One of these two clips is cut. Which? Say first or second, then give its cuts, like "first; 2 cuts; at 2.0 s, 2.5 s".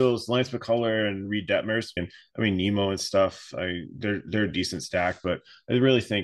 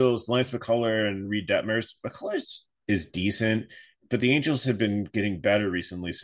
first; 1 cut; at 2.0 s